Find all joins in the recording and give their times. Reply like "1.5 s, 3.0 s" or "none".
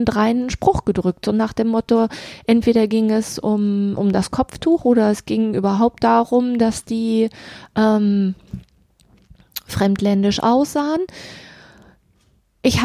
none